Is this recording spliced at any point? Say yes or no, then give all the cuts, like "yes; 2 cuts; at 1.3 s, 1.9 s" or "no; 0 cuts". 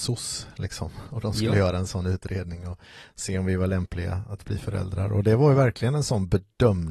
no; 0 cuts